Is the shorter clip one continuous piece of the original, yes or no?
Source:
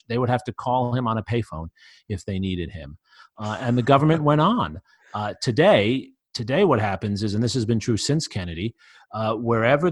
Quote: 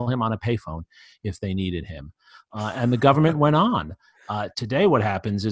no